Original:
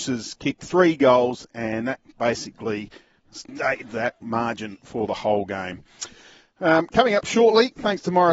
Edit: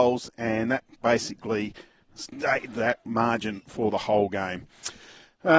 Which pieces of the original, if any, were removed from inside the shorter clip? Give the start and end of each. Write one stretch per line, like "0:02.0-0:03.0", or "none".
none